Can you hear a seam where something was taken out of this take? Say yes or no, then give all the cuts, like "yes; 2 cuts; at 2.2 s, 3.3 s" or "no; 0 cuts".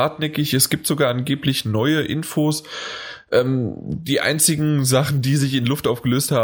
no; 0 cuts